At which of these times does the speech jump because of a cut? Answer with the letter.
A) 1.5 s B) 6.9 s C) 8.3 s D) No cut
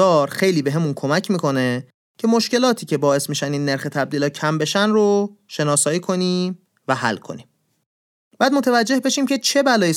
C